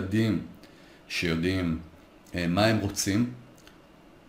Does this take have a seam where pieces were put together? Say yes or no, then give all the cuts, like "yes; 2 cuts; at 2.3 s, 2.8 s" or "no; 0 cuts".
no; 0 cuts